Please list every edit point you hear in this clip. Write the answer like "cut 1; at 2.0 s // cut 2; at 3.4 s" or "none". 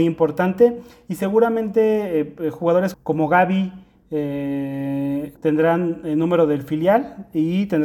cut 1; at 2.9 s // cut 2; at 5.4 s